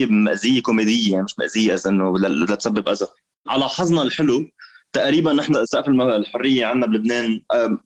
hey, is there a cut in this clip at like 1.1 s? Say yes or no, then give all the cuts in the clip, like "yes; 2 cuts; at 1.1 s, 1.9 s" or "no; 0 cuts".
no; 1 cut; at 3.3 s